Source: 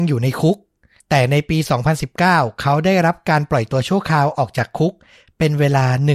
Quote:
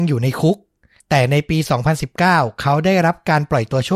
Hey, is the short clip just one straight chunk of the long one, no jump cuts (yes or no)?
yes